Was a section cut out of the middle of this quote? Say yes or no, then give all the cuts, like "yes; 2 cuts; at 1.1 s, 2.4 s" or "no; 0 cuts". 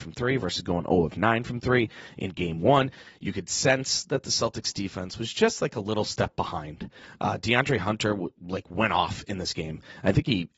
no; 0 cuts